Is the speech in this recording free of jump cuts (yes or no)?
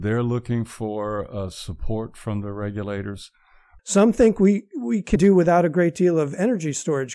no